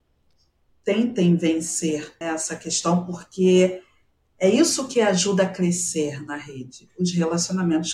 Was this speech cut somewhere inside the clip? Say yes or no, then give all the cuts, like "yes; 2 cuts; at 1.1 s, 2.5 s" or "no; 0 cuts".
yes; 1 cut; at 2.2 s